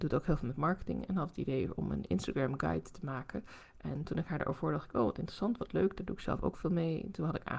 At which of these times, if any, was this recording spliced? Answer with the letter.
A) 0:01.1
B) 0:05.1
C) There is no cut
C